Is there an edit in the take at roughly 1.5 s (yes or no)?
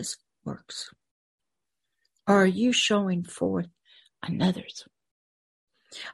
no